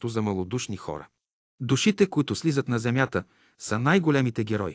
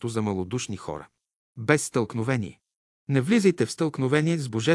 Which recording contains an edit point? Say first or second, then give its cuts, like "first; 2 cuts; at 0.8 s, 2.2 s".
second; 1 cut; at 1.5 s